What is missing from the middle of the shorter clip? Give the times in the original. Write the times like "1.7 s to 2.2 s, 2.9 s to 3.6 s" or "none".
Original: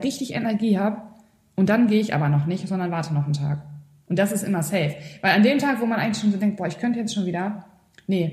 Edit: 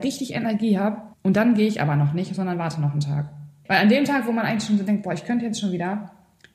1.1 s to 1.5 s, 4.0 s to 5.2 s